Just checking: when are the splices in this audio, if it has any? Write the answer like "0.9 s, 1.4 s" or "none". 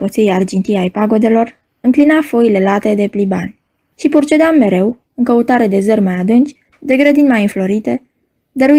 3.9 s, 6.7 s

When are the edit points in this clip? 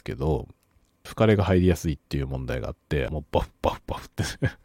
1.1 s, 3.1 s

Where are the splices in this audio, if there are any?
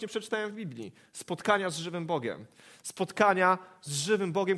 none

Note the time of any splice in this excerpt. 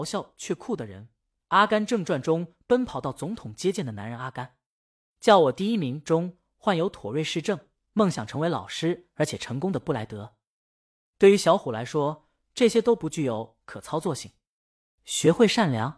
none

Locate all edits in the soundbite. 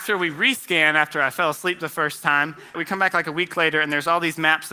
2.7 s

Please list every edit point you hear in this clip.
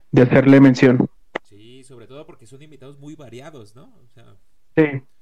none

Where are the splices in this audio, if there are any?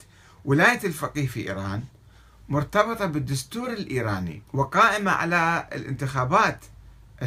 4.5 s

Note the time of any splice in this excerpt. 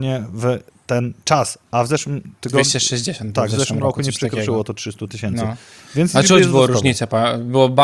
none

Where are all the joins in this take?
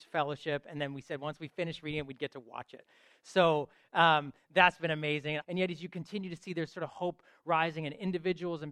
5.4 s

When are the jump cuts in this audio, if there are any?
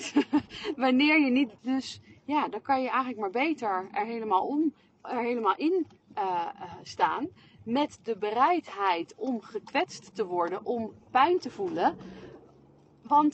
1.6 s

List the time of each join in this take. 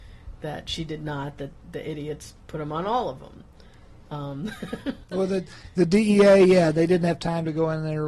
none

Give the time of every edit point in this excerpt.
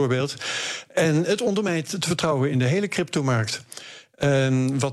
none

